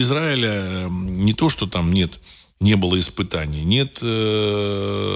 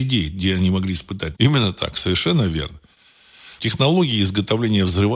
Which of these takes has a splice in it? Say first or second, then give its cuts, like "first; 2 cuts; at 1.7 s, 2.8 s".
second; 2 cuts; at 1.3 s, 3.6 s